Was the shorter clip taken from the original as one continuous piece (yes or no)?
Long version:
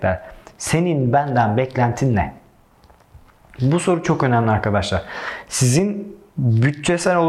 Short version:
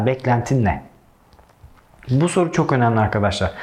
yes